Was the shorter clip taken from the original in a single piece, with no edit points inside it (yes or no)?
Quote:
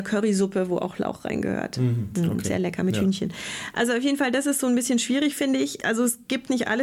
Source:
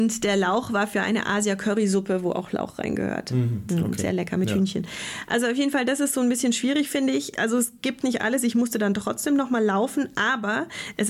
yes